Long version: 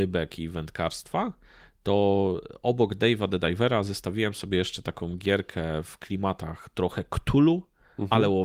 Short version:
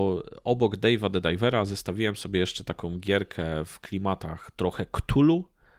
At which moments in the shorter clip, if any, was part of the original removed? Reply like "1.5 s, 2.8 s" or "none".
none